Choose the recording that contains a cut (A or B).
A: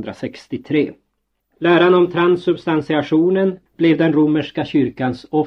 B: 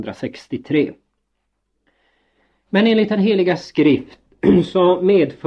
A